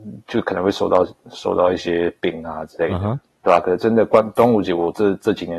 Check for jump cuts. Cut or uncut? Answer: uncut